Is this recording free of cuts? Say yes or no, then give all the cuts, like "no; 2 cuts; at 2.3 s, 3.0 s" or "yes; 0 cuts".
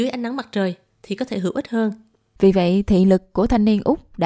no; 1 cut; at 2.4 s